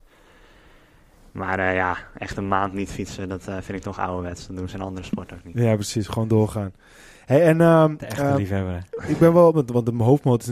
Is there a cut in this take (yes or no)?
yes